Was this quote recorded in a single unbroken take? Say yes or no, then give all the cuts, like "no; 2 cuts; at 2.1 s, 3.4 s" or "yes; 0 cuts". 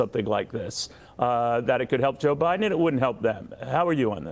yes; 0 cuts